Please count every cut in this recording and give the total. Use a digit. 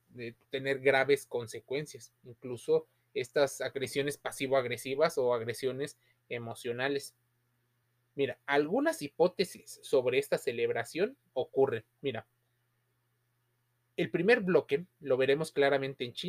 0